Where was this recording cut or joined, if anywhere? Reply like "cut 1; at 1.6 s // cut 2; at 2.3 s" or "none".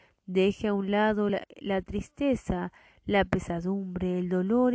none